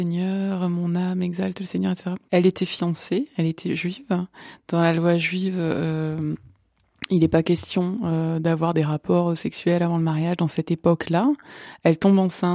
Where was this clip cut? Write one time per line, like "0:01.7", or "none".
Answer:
0:02.3